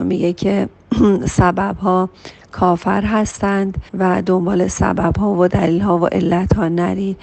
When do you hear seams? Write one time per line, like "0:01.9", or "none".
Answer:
0:03.9